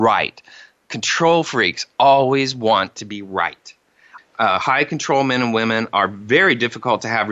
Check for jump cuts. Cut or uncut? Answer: cut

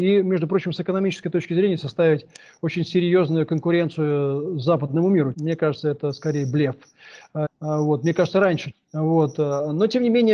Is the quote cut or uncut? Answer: cut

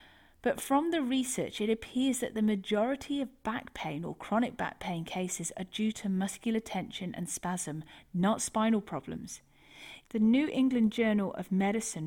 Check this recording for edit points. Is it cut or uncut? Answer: cut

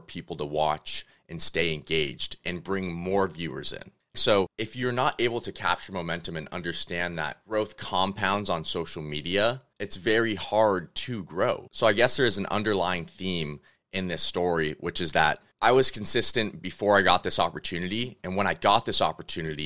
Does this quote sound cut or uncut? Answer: cut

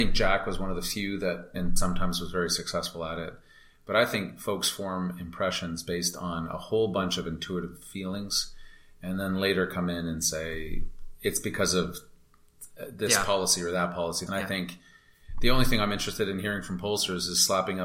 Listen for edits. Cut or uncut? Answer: cut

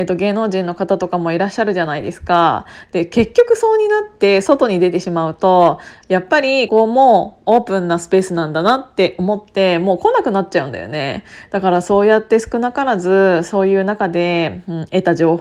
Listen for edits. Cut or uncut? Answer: cut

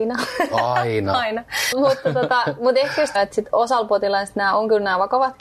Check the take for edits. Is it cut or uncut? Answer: cut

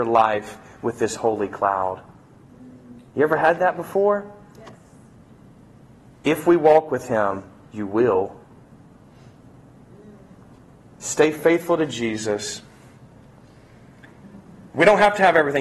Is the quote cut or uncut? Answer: uncut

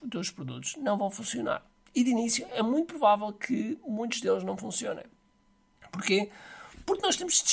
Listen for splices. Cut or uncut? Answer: uncut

